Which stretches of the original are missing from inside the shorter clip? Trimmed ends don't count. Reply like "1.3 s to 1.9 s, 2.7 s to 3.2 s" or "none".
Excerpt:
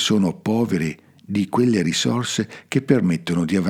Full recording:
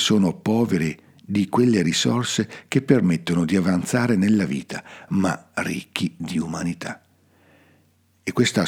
none

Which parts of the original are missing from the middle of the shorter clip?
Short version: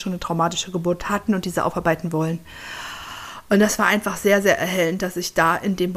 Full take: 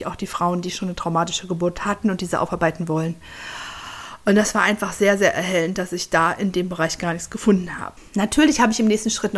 none

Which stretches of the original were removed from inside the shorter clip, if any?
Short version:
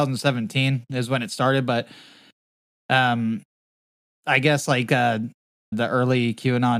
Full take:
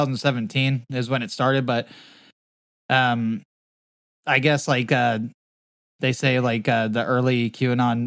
5.7 s to 6.9 s

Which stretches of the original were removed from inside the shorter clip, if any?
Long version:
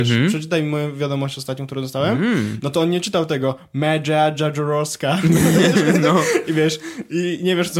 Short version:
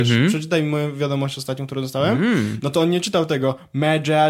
none

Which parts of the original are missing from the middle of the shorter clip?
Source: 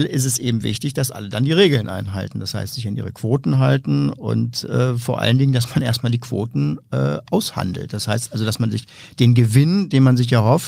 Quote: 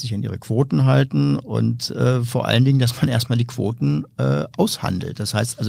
none

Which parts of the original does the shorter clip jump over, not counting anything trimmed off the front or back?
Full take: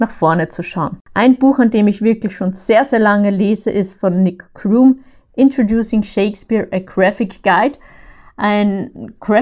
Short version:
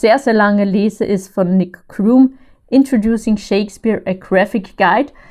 none

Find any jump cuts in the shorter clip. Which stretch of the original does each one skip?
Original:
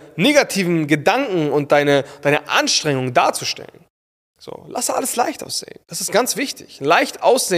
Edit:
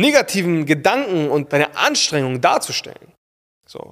1.7 s to 2.2 s

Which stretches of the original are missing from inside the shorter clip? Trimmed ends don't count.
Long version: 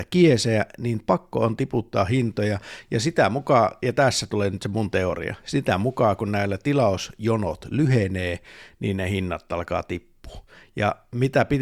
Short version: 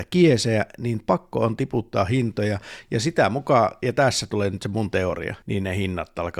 5.4 s to 8.8 s

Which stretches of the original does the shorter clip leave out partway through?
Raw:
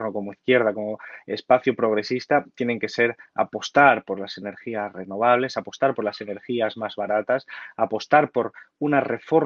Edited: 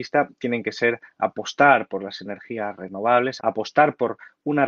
5.5 s to 7.7 s

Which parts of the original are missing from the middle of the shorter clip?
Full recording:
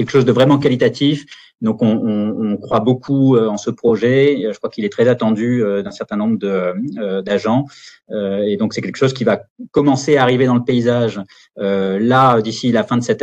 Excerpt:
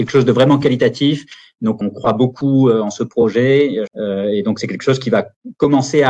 1.8 s to 2.5 s, 4.5 s to 8.0 s

